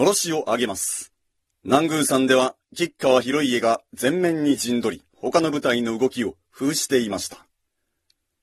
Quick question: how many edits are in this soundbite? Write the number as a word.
two